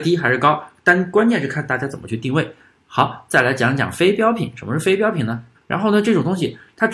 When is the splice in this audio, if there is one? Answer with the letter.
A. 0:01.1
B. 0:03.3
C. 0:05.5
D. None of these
C